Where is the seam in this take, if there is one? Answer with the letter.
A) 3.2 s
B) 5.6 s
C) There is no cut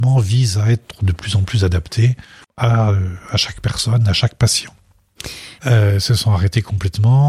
B